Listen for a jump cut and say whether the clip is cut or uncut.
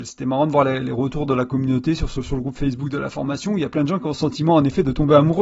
uncut